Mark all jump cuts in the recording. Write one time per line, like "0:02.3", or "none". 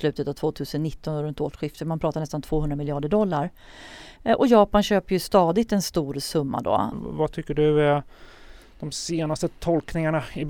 0:04.2
0:06.9

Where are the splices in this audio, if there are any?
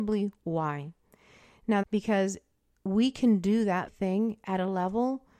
0:01.8
0:03.9

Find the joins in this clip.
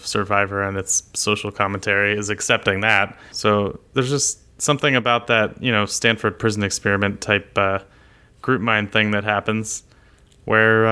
0:03.3

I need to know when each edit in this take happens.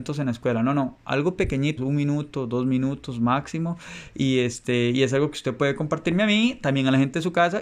0:01.8

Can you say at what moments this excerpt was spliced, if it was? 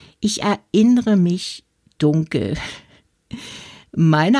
none

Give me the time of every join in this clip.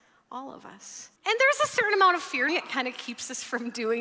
0:01.2
0:02.5

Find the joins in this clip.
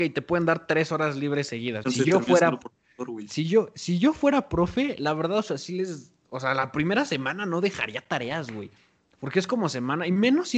0:01.8

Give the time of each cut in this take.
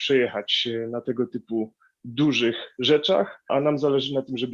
0:03.5

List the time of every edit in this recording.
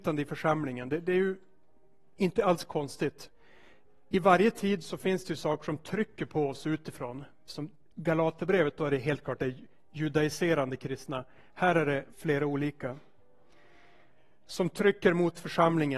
0:07.5
0:12.1

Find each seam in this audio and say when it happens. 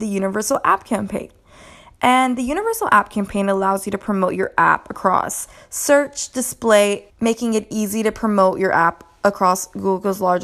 0:07.1

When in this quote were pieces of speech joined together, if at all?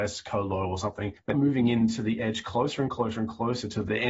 0:01.3

